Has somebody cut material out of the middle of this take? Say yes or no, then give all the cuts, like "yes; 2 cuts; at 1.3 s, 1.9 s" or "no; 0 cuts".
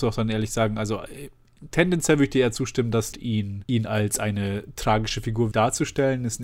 yes; 2 cuts; at 3.1 s, 5.5 s